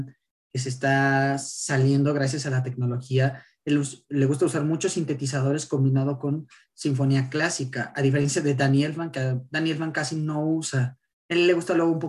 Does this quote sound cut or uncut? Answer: uncut